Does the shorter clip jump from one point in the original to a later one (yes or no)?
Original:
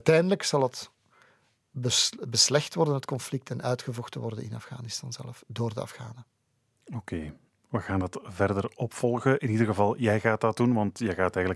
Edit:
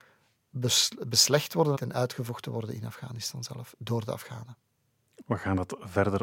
yes